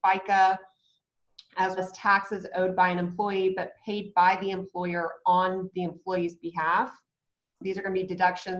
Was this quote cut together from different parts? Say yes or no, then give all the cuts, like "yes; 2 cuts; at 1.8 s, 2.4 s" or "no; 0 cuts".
yes; 2 cuts; at 1.8 s, 7.6 s